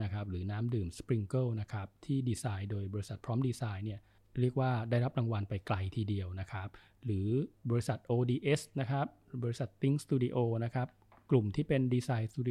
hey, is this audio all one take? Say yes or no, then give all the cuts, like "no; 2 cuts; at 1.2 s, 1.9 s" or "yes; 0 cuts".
yes; 0 cuts